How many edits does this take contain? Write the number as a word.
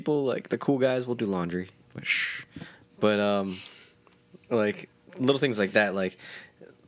zero